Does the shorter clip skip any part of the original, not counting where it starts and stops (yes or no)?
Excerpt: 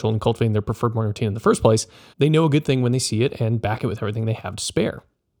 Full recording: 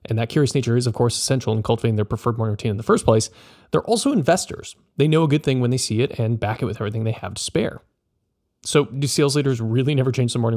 yes